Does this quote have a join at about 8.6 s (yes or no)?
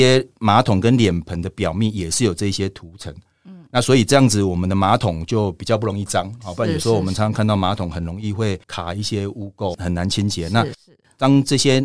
yes